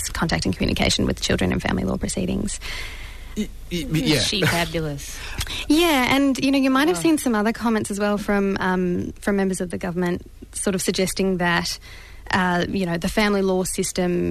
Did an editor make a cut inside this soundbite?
no; 0 cuts

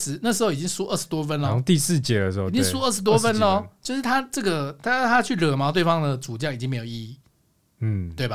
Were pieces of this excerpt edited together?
no; 0 cuts

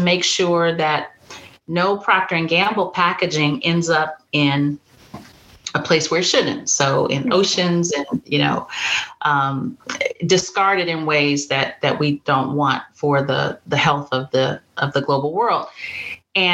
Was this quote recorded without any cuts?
yes; 0 cuts

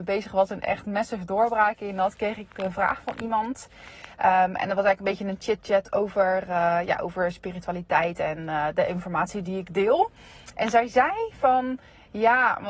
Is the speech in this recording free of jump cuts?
yes; 0 cuts

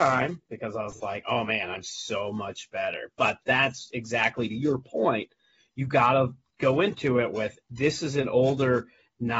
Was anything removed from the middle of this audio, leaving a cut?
no; 0 cuts

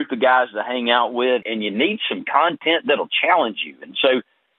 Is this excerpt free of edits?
no; 1 cut; at 1.4 s

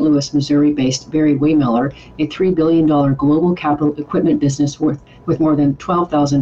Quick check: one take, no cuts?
yes; 0 cuts

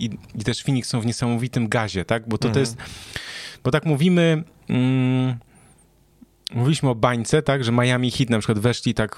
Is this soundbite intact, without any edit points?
yes; 0 cuts

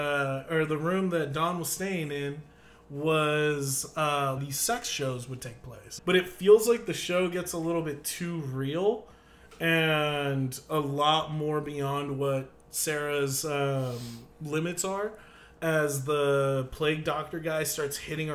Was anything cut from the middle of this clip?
yes; 3 cuts; at 4.4 s, 6.0 s, 14.3 s

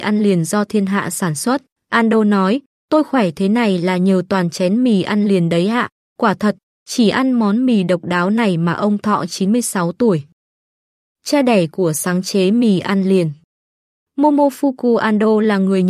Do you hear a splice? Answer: yes; 1 cut; at 1.8 s

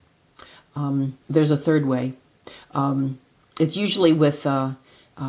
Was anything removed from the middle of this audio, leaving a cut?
yes; 1 cut; at 1.2 s

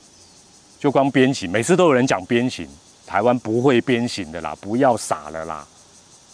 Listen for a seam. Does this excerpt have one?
no; 0 cuts

